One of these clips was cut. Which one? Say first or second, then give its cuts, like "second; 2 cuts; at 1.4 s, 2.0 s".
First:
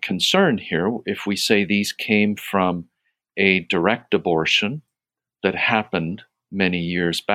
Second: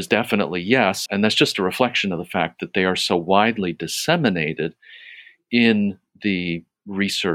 second; 1 cut; at 1.1 s